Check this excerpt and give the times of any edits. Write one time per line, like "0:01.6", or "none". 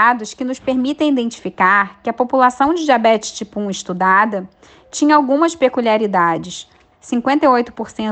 0:06.9